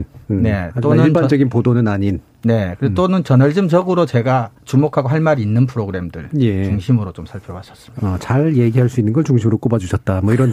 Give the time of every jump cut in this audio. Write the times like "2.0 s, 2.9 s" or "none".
4.6 s, 8.0 s